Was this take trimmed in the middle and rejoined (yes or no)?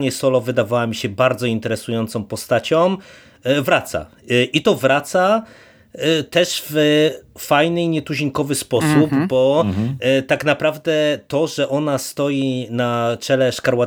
no